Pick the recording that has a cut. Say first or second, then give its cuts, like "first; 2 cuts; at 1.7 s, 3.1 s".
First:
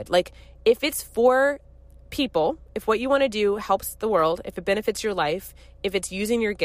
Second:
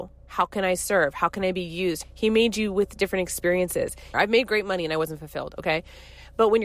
second; 2 cuts; at 2.0 s, 4.1 s